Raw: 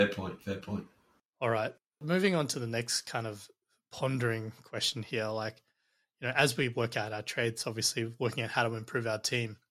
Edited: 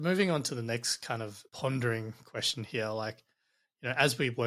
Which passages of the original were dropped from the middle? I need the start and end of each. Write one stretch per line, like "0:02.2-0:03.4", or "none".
0:03.5-0:03.9